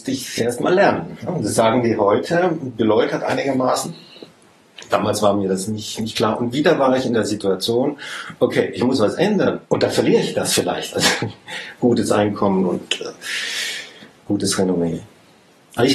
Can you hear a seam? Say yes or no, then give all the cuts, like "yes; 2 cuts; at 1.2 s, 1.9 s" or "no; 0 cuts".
yes; 1 cut; at 9.6 s